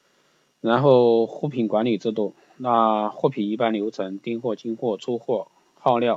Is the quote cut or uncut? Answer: uncut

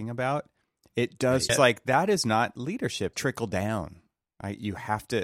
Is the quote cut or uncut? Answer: cut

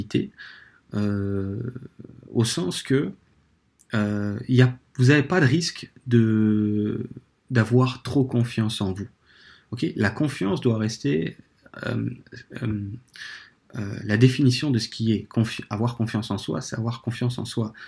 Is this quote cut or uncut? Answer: uncut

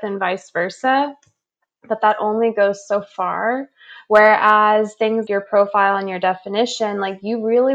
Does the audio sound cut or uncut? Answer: cut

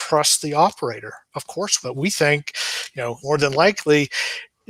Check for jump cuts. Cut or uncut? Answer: cut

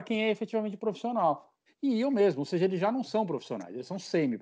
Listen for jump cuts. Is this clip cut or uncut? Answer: cut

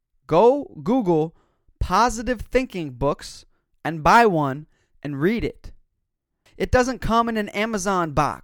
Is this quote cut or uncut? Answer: cut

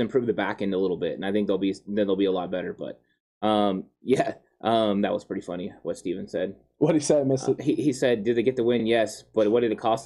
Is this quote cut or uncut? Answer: uncut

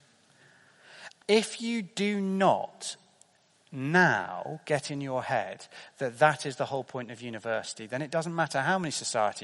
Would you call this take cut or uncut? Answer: cut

